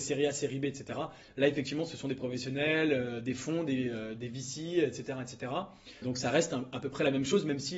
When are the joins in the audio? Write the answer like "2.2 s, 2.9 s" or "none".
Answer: 6.0 s